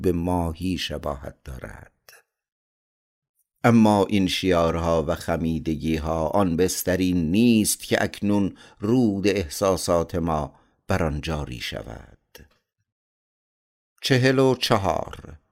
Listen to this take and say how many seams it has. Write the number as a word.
zero